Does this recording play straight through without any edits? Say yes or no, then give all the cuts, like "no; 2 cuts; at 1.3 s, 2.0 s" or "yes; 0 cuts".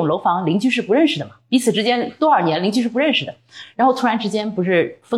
yes; 0 cuts